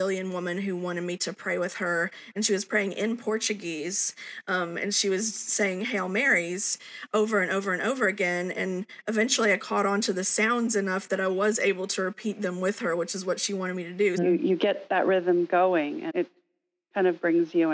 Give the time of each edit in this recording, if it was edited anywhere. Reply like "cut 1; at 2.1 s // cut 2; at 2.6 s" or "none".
cut 1; at 14.2 s // cut 2; at 16.1 s